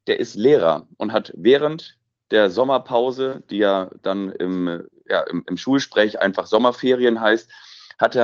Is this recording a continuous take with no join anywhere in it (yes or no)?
yes